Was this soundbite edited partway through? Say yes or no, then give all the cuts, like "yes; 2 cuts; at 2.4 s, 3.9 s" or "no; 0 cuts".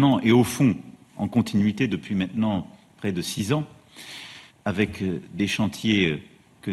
yes; 1 cut; at 4.5 s